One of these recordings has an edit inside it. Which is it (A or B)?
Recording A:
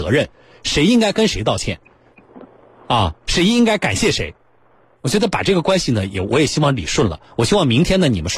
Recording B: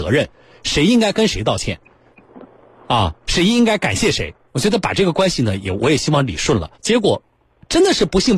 B